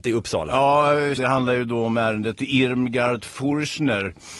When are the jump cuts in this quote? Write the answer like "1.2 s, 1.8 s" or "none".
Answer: 1.2 s